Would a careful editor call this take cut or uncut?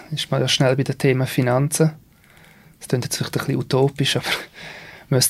uncut